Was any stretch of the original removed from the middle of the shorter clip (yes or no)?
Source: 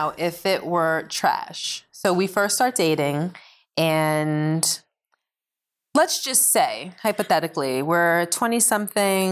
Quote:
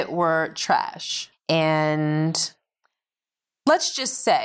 yes